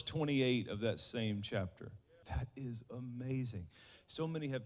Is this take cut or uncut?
cut